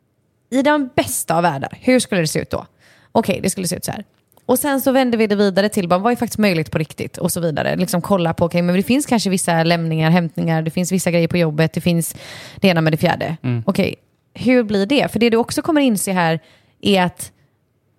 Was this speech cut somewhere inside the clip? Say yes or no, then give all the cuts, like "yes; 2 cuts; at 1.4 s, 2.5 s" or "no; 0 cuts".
no; 0 cuts